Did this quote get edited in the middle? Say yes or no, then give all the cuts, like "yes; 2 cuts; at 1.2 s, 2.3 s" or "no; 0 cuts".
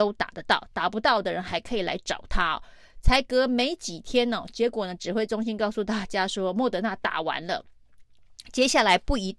no; 0 cuts